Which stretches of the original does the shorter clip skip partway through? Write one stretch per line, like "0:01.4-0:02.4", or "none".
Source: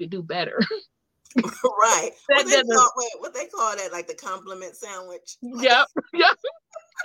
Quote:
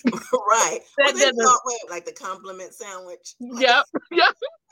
0:03.2-0:03.9